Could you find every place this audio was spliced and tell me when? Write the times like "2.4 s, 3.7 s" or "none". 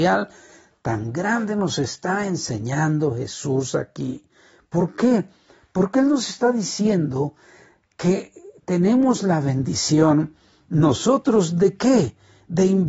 none